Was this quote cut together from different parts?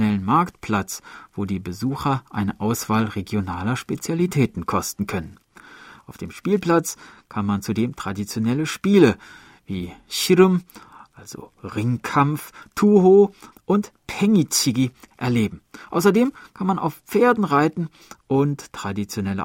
yes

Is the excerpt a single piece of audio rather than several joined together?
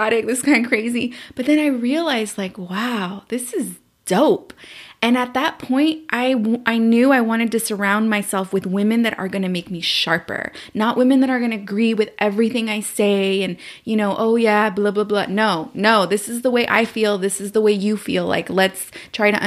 yes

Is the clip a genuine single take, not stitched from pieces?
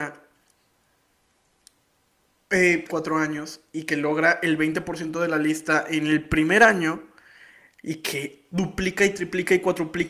no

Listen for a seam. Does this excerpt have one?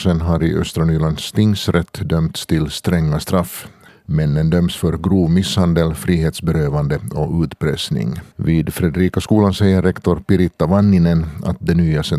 yes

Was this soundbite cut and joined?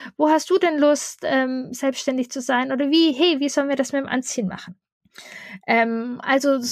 no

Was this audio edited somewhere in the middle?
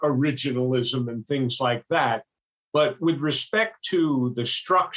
no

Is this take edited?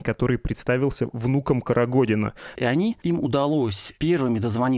yes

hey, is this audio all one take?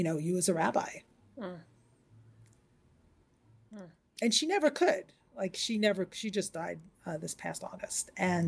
yes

